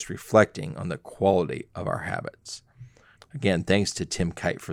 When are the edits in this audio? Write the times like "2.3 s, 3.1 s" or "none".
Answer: 3.2 s